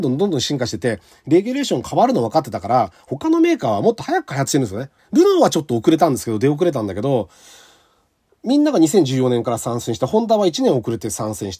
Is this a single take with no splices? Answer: no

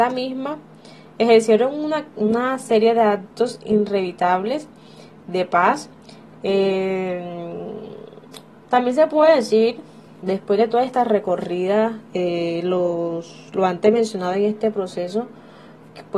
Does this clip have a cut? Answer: yes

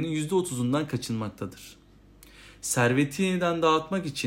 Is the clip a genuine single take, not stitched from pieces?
yes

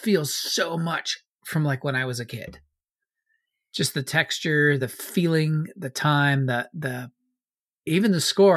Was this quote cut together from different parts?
no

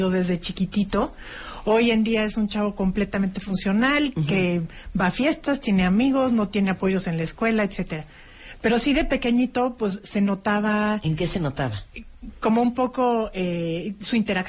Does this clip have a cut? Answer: no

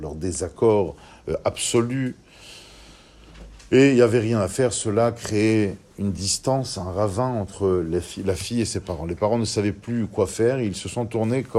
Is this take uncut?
yes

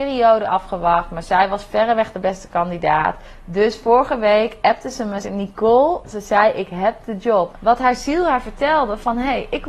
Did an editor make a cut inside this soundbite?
yes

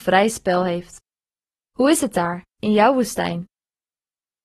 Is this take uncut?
no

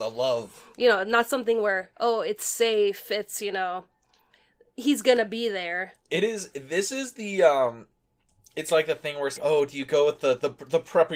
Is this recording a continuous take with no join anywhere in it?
no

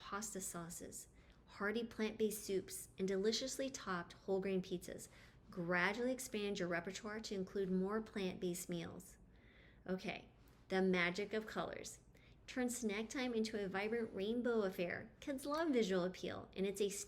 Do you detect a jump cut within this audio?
yes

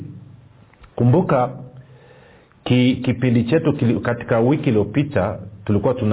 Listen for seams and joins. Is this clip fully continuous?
yes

